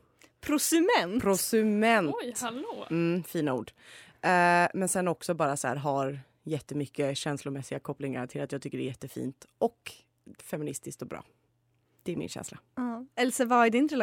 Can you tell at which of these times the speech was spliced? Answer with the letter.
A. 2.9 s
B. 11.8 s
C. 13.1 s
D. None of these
D